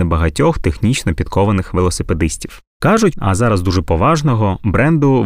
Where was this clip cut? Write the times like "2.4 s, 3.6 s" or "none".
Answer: 3.1 s